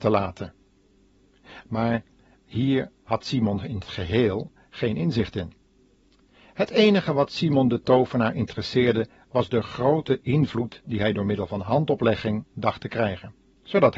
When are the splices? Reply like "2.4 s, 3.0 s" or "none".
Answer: none